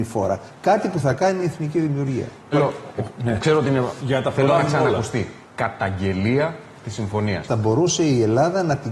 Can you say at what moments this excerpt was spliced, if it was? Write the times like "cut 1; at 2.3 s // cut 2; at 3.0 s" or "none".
cut 1; at 2.5 s // cut 2; at 5.4 s // cut 3; at 7.5 s